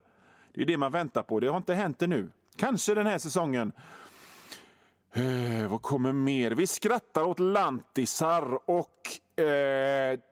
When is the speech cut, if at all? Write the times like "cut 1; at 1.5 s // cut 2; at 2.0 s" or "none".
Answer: none

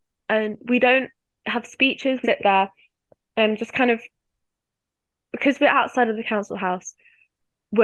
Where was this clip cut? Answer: cut 1; at 2.2 s

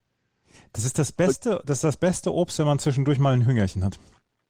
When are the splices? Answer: none

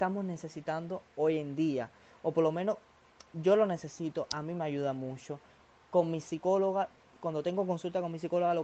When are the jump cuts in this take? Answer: none

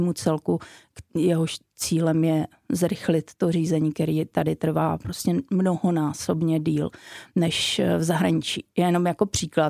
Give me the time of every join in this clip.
none

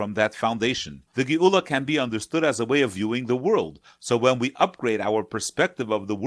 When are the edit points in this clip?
cut 1; at 1.1 s

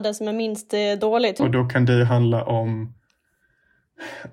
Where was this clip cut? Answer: cut 1; at 1.4 s

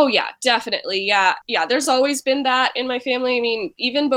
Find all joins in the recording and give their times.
none

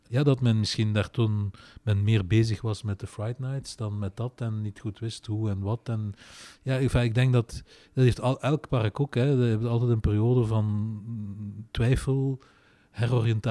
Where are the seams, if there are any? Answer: none

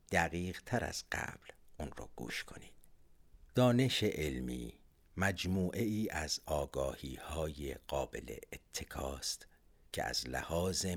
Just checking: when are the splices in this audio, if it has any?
cut 1; at 3.5 s

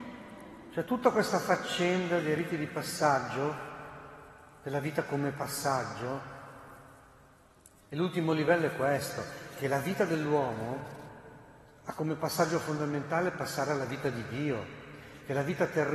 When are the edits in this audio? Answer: none

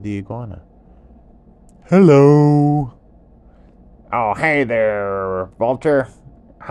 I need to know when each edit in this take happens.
none

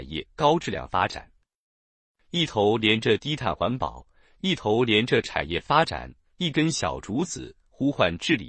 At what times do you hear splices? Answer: none

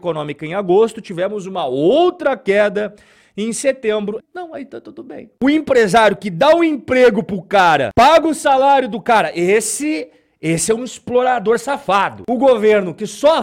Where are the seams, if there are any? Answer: cut 1; at 4.2 s

